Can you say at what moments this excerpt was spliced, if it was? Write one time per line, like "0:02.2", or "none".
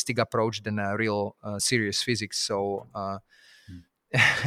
none